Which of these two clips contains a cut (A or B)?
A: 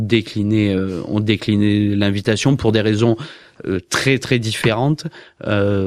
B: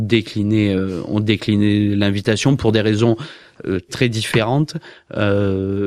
B